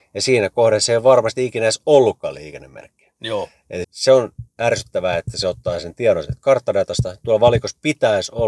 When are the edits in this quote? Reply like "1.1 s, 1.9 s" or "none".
3.8 s

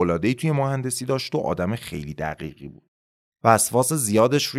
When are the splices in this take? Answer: 3.3 s

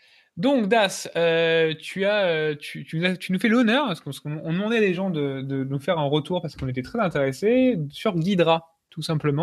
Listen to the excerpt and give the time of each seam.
none

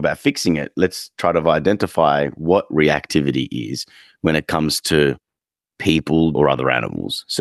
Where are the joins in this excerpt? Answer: 6.3 s

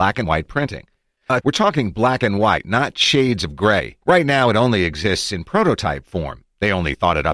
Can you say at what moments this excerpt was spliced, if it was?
1.4 s, 4.0 s

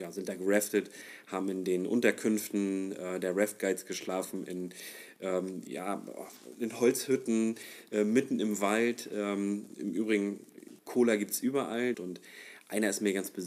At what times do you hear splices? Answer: 10.8 s, 11.9 s

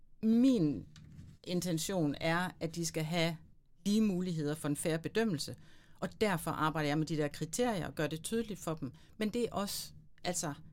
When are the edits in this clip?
none

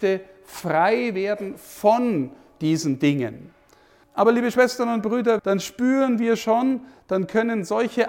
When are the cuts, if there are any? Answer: 4.0 s, 5.4 s

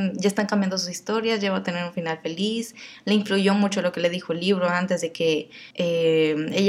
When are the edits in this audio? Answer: 5.7 s

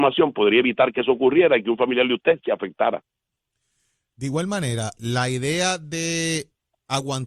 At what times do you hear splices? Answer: 5.0 s

